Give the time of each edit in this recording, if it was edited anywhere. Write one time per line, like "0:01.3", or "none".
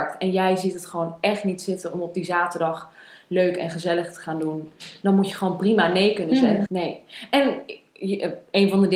0:06.7